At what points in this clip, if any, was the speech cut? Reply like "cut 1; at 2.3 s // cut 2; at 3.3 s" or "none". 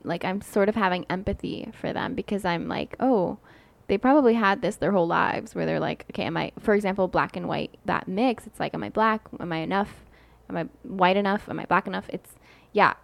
cut 1; at 7.9 s